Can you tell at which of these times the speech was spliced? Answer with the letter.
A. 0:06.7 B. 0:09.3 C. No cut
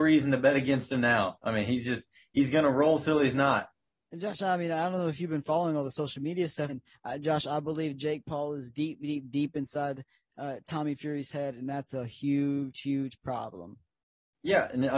A